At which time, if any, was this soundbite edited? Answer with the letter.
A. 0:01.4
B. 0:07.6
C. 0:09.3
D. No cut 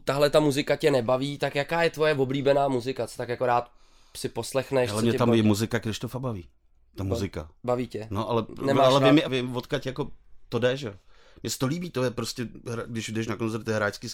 C